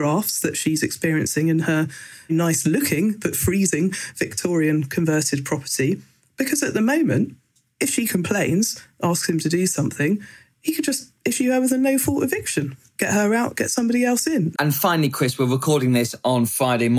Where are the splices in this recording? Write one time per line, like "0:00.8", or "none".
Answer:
0:02.3
0:14.5